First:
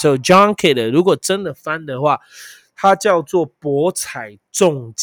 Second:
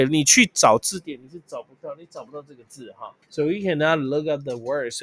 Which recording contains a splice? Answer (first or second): second